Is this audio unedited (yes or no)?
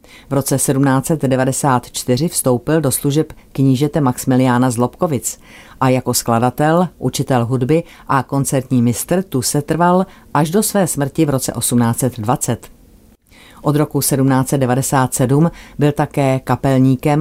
yes